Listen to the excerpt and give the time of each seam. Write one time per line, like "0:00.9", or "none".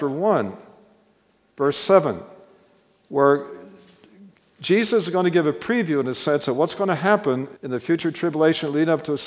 0:07.6